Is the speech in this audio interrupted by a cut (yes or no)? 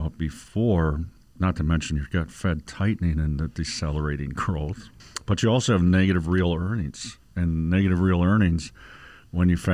no